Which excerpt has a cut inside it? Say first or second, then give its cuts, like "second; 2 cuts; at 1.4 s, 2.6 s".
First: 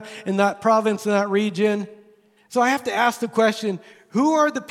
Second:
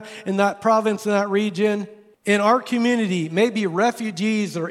second; 1 cut; at 2.1 s